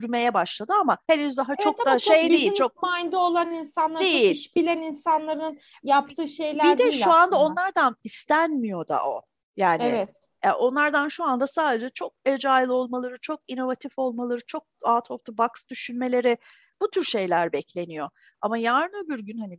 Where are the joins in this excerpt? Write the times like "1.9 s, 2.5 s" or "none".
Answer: 1.0 s